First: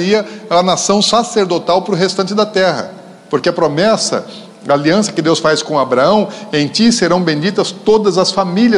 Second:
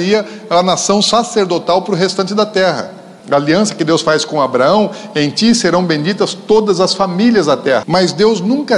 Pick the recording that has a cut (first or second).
second